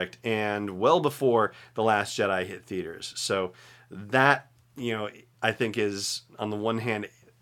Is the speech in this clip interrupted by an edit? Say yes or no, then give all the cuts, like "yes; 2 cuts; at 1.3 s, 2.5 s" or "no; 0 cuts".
no; 0 cuts